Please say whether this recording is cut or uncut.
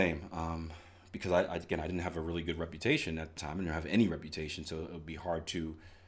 uncut